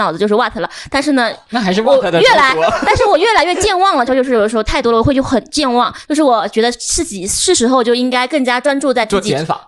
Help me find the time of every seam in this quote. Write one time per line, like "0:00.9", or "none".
0:04.1
0:06.0